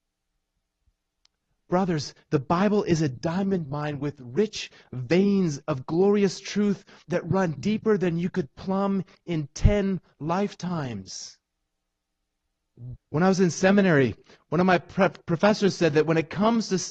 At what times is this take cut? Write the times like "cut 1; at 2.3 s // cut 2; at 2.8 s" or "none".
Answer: cut 1; at 7.0 s // cut 2; at 13.0 s